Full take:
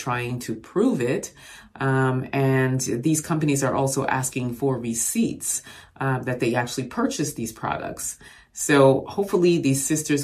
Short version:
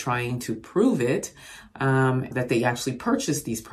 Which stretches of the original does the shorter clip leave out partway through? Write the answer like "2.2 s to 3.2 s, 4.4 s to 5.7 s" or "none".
2.3 s to 6.2 s

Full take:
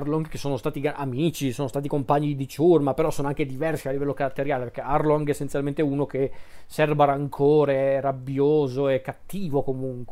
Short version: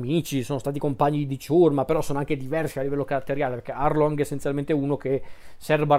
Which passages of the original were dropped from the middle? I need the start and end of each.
none

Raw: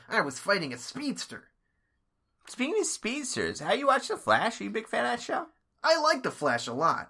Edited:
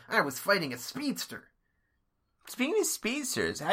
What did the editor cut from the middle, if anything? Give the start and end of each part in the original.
none

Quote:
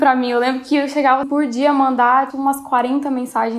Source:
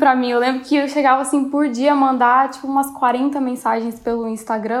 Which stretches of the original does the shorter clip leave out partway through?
1.2 s to 1.5 s, 2.5 s to 2.6 s

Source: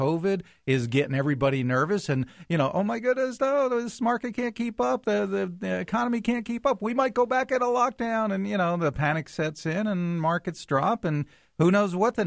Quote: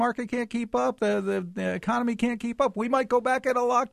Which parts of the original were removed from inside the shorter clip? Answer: none

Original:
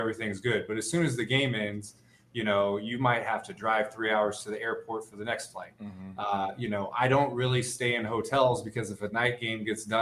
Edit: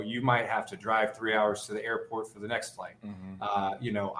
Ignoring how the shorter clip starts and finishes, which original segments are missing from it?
none

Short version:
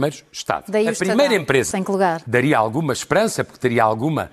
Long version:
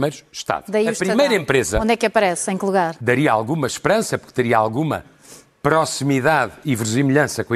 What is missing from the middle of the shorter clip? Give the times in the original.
1.7 s to 2.5 s

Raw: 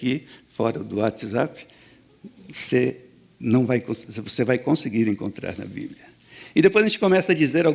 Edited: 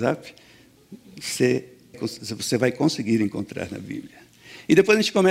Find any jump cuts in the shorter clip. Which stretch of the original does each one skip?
3.3 s to 3.8 s

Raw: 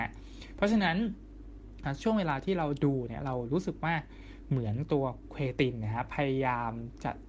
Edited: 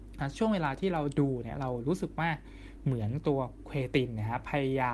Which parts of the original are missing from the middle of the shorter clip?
none

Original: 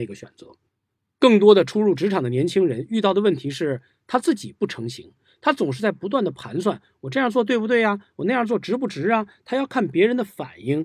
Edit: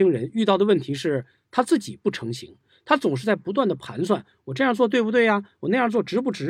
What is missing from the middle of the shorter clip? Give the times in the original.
none

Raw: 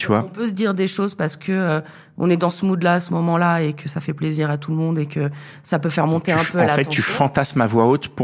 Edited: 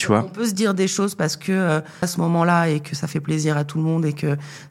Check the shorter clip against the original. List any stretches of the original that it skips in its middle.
2.0 s to 3.0 s

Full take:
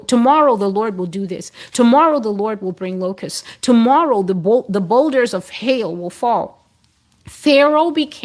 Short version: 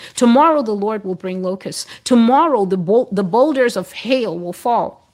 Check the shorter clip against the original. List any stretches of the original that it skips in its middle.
none

